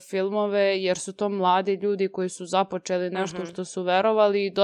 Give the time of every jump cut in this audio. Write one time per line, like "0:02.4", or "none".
none